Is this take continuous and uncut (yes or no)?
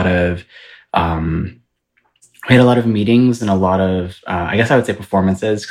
yes